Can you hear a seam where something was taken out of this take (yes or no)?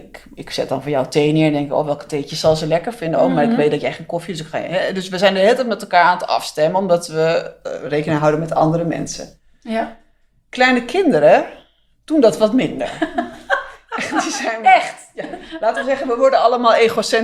no